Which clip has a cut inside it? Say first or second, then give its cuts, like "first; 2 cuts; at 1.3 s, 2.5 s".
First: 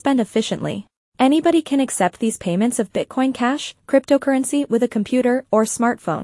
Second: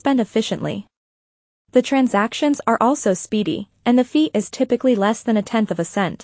first; 2 cuts; at 1.1 s, 3.8 s